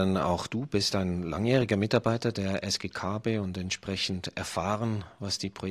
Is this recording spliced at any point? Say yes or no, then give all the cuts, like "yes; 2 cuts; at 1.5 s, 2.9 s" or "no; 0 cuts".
no; 0 cuts